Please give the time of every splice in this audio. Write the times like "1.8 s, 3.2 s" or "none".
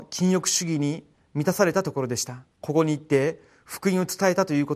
2.5 s

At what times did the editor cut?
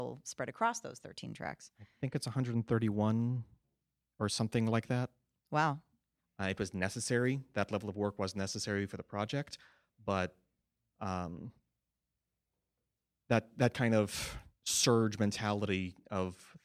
6.2 s

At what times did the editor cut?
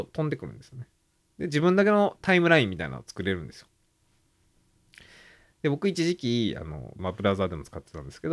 1.2 s, 7.0 s

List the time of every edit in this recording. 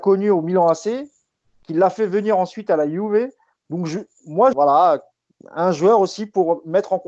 4.5 s

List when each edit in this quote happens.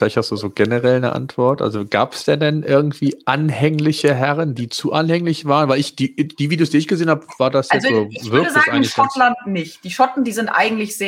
none

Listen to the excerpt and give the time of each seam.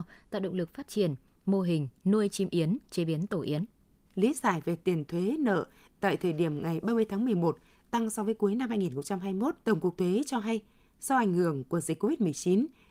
4.1 s, 9.6 s

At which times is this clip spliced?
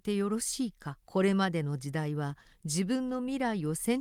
1.0 s

